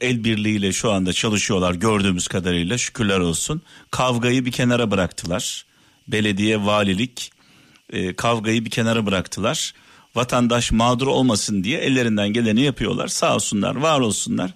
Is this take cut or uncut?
uncut